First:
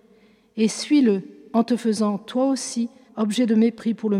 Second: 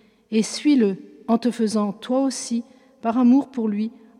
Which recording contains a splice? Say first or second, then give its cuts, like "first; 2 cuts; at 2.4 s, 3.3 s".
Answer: first; 1 cut; at 3.1 s